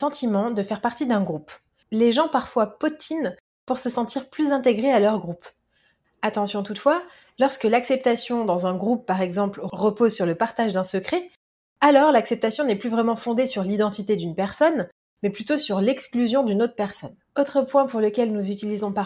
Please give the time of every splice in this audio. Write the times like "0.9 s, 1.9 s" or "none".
none